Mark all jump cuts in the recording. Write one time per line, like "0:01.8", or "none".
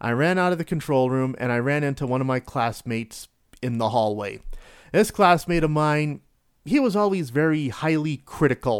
none